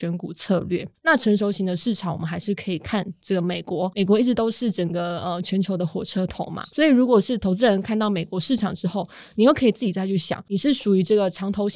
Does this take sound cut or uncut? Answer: uncut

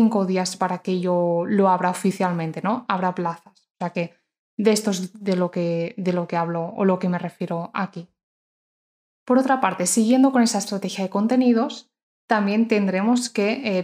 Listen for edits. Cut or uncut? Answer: uncut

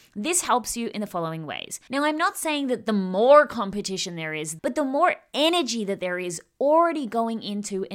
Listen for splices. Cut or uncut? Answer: cut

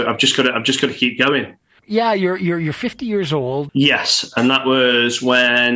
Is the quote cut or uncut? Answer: cut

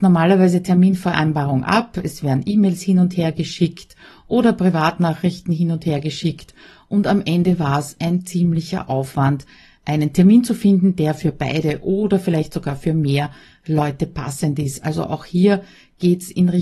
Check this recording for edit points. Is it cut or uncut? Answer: uncut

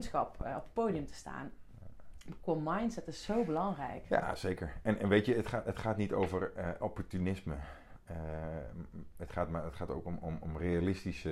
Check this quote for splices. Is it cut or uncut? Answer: uncut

